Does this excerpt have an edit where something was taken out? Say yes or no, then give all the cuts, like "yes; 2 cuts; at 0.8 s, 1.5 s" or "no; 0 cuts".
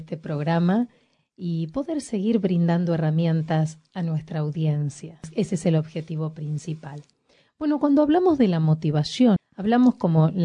yes; 1 cut; at 9.4 s